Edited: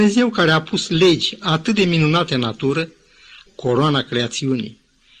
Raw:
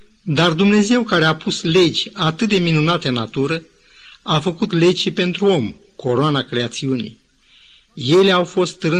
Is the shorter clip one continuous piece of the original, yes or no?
no